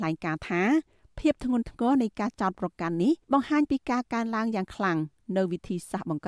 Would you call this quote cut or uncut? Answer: cut